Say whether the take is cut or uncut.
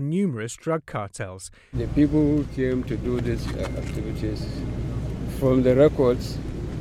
cut